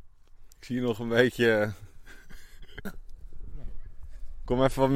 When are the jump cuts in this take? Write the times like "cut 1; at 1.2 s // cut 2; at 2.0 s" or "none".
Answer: cut 1; at 2.9 s